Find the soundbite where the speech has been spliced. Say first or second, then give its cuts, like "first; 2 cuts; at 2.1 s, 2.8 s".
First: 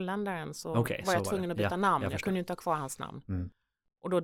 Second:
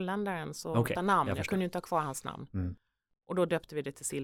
second; 1 cut; at 1.0 s